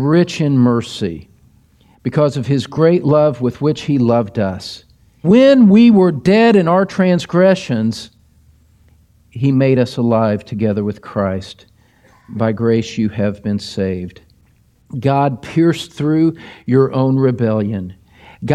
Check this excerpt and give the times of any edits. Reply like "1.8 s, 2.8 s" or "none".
5.2 s

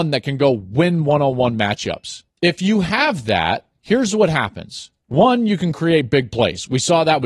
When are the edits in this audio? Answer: 2.3 s

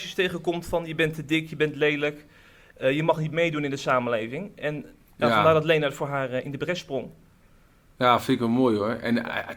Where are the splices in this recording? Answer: none

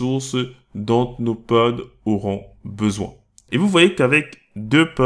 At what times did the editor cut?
3.5 s

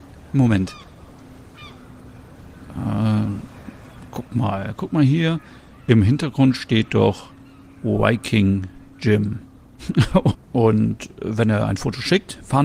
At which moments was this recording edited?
10.3 s

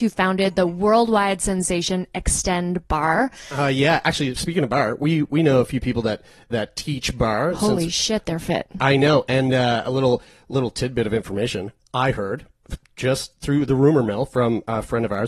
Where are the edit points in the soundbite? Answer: none

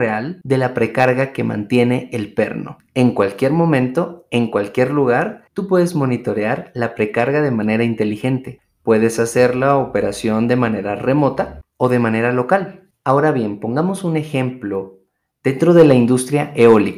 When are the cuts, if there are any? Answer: none

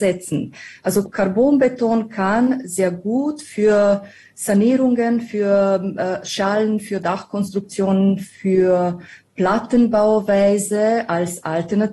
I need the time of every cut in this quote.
none

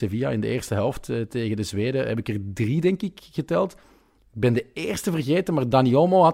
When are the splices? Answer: none

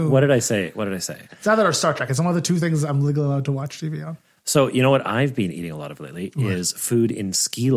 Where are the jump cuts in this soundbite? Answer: 1.3 s

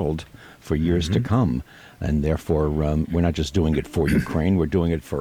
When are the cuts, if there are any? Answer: none

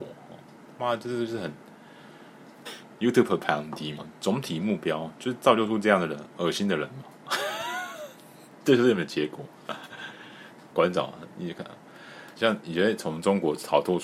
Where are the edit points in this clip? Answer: 2.7 s, 4.0 s, 12.4 s

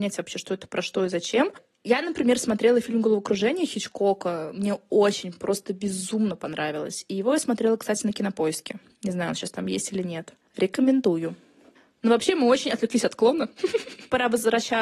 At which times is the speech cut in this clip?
none

